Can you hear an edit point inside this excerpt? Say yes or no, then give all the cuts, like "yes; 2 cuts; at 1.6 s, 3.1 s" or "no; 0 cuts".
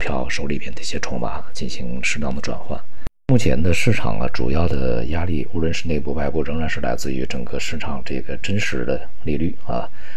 no; 0 cuts